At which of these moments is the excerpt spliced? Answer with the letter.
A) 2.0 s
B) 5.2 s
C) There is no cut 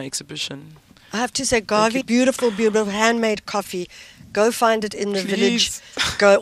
A